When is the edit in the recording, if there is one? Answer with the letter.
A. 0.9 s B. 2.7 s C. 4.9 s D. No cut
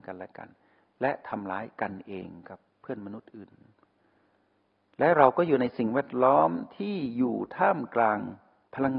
B